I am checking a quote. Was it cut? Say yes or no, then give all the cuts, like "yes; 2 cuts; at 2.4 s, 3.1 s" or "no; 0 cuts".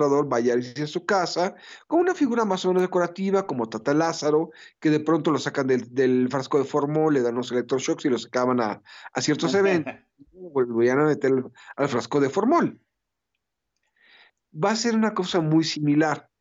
no; 0 cuts